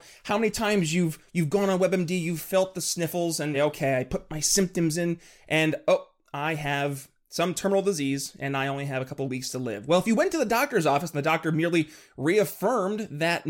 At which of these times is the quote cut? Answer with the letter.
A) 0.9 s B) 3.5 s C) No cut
B